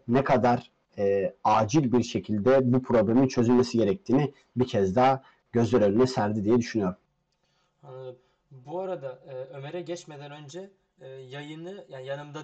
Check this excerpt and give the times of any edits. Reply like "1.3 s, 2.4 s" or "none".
none